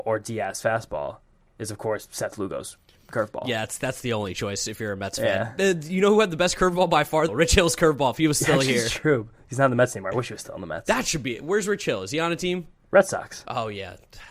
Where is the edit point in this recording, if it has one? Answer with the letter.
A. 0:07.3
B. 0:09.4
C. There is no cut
A